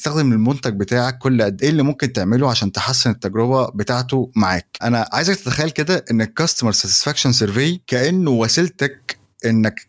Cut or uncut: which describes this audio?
cut